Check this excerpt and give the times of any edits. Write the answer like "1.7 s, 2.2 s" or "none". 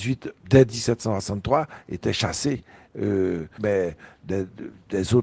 3.6 s